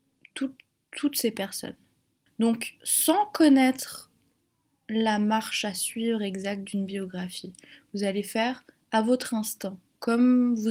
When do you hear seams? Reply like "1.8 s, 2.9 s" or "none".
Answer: 2.3 s